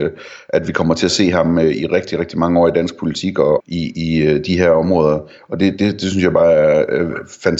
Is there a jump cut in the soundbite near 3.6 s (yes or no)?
yes